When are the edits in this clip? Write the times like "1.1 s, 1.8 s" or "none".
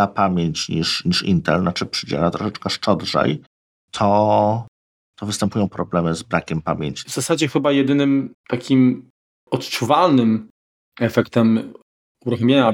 7.1 s, 8.4 s